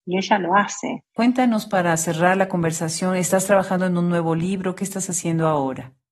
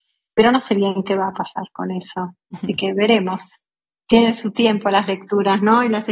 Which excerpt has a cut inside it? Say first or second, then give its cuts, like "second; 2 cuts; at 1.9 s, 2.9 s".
first; 1 cut; at 1.2 s